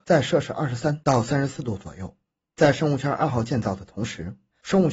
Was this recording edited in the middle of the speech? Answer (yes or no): no